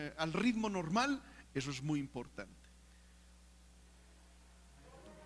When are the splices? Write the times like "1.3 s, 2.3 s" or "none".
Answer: 1.4 s